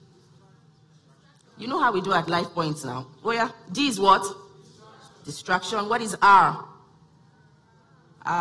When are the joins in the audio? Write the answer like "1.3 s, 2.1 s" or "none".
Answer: 1.5 s